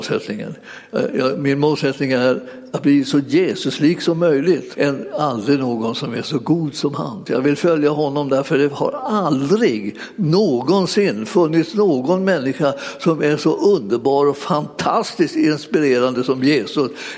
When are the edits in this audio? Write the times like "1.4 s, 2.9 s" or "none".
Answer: 4.7 s, 7.3 s

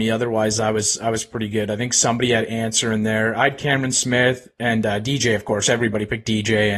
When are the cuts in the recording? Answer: none

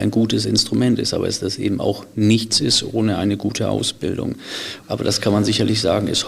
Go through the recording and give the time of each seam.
4.8 s

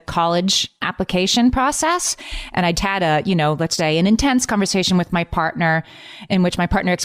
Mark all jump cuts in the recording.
2.7 s, 3.8 s

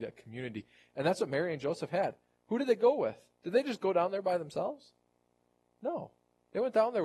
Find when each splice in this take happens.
none

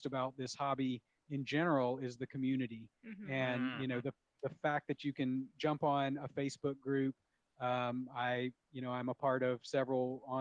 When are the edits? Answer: none

